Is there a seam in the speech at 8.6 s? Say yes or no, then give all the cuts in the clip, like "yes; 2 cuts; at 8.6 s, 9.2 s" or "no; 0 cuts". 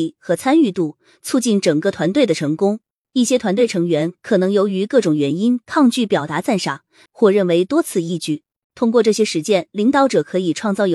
yes; 2 cuts; at 7.1 s, 8.6 s